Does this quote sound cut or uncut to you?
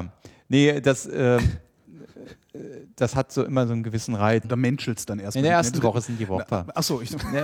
cut